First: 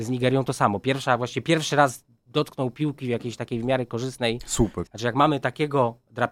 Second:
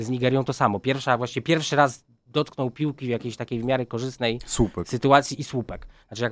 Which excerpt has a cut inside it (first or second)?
first